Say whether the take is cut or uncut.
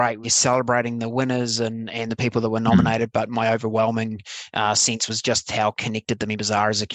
uncut